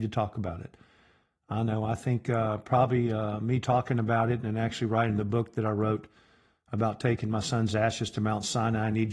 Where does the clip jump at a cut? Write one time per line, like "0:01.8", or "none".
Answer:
none